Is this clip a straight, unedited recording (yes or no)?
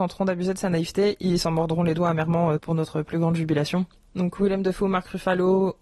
no